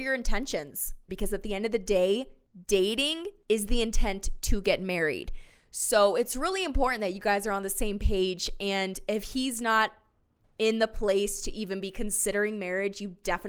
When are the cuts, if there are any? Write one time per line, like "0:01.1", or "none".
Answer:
0:01.1